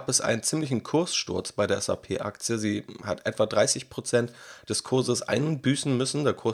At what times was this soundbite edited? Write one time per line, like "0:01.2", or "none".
none